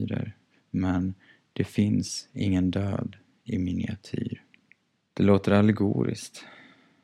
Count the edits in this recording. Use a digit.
1